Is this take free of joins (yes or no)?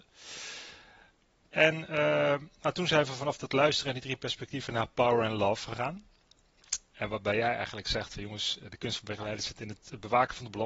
yes